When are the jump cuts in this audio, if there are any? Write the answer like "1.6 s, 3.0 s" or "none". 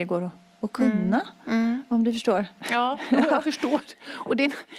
none